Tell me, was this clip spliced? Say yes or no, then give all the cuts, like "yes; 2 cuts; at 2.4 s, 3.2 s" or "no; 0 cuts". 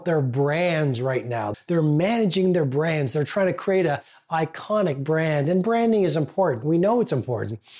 yes; 1 cut; at 1.5 s